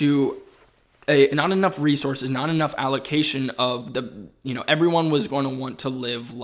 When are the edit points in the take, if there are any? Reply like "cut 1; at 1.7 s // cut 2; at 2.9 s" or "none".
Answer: cut 1; at 1.3 s